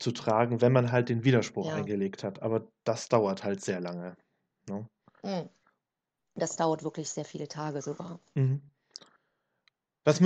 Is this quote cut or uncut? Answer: uncut